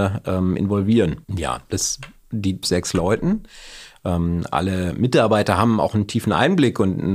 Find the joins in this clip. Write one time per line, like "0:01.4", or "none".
0:01.2
0:02.6